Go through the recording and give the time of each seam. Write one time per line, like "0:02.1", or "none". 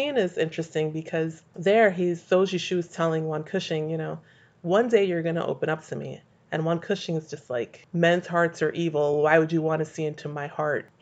none